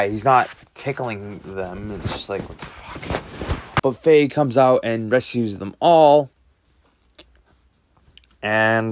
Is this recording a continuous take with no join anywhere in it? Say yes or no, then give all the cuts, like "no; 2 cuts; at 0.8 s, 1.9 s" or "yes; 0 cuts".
no; 1 cut; at 3.8 s